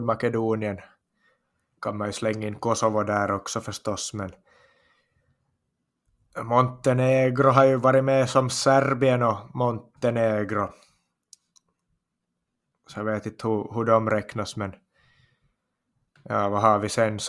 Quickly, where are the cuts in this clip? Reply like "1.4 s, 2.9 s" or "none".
1.8 s

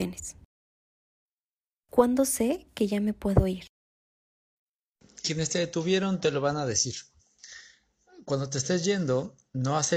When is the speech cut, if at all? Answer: 1.7 s

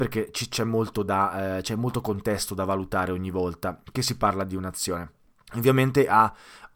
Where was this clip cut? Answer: 5.5 s

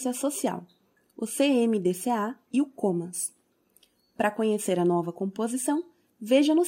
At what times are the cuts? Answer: none

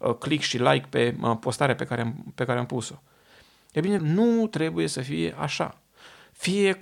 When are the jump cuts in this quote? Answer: 4.0 s

